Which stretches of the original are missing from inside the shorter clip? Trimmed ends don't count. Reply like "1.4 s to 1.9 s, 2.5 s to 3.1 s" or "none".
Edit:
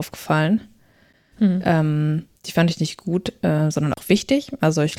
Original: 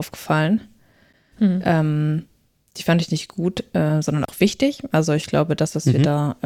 2.4 s to 2.7 s